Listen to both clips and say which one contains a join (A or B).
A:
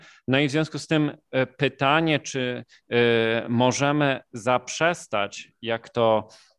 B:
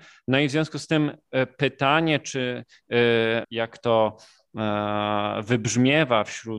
B